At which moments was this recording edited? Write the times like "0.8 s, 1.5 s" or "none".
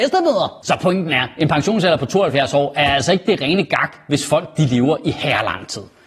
none